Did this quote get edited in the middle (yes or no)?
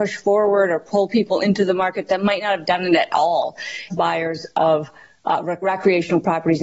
yes